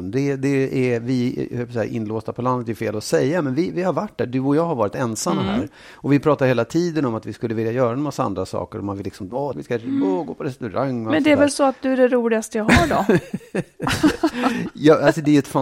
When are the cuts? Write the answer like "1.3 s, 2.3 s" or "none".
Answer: 9.5 s